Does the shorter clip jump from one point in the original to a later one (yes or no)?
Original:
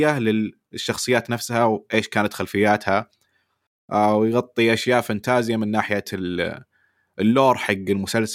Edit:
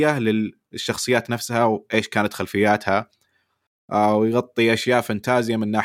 no